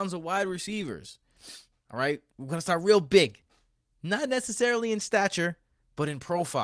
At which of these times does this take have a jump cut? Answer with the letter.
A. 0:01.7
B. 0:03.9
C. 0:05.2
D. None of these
A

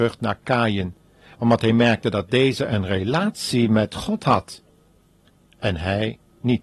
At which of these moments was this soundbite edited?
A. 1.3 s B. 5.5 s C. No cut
A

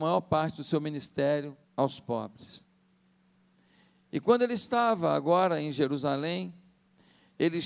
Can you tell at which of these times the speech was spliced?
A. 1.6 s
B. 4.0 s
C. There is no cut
A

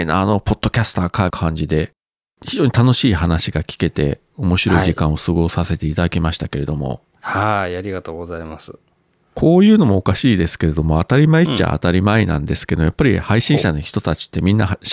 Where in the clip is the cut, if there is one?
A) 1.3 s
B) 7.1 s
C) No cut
A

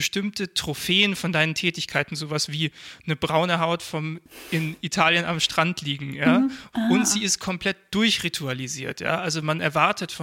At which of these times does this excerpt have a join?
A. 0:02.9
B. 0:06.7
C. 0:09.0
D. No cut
B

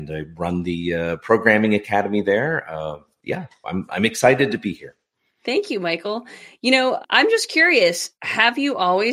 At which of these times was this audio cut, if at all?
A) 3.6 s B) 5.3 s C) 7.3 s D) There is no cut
A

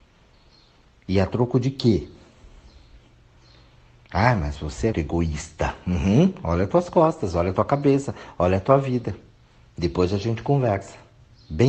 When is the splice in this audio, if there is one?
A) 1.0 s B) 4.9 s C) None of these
B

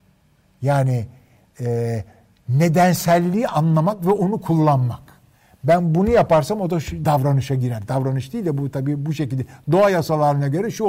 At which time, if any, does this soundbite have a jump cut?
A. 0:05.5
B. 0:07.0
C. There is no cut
B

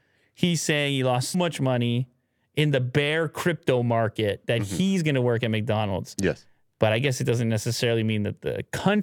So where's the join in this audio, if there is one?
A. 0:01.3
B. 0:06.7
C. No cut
A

